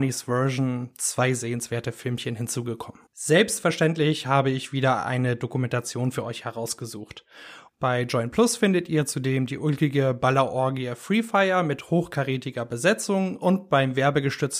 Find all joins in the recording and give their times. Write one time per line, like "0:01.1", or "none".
0:03.1
0:07.7